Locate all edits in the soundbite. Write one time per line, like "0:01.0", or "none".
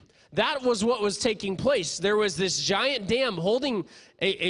none